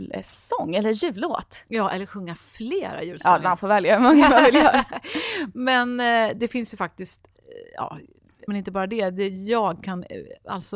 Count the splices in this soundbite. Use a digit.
1